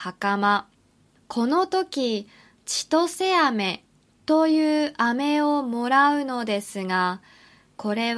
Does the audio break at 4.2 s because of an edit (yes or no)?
no